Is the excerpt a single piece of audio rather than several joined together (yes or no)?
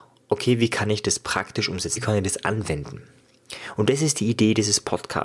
no